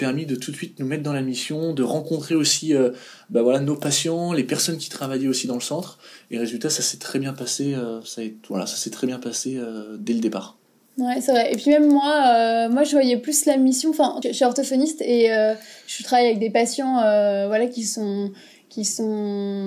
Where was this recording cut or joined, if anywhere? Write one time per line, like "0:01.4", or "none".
0:14.2